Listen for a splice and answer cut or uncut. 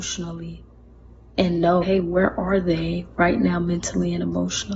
cut